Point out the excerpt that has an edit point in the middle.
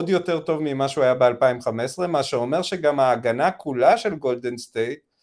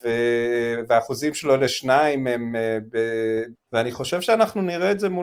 second; 1 cut; at 3.5 s

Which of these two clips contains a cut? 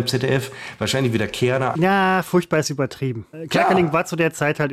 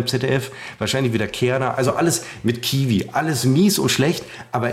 first; 2 cuts; at 1.7 s, 3.3 s

